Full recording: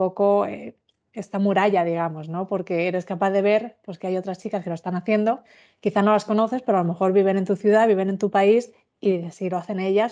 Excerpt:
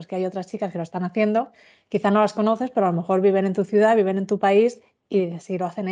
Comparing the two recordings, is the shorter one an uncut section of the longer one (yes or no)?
yes